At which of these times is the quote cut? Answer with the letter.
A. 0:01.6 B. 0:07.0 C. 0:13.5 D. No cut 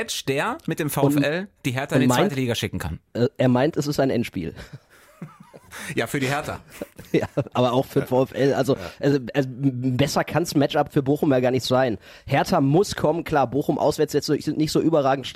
D